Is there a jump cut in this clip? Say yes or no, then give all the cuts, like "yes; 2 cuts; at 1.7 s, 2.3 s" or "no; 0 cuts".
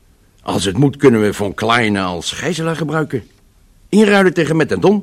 no; 0 cuts